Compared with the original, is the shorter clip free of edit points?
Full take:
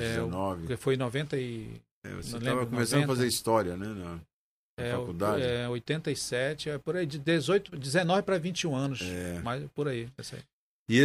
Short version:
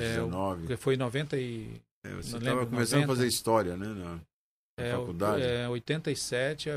yes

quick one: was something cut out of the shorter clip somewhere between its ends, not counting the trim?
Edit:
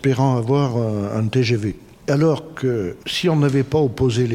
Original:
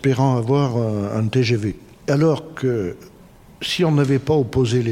yes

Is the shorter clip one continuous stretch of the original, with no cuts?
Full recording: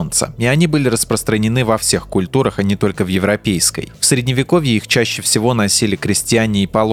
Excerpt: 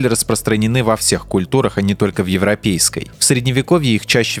yes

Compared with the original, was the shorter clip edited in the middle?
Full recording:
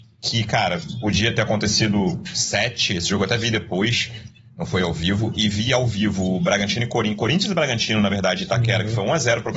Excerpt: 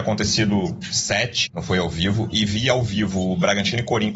yes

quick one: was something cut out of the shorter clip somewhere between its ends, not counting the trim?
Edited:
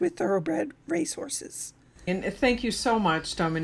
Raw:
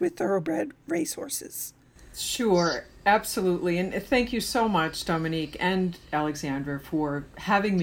yes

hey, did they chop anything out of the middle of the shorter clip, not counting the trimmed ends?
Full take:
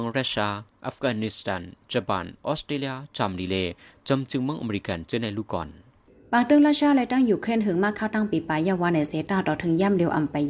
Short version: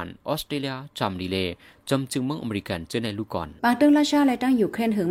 yes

